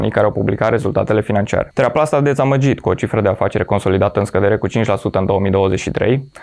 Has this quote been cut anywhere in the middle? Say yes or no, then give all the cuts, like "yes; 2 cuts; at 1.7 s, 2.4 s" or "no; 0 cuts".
no; 0 cuts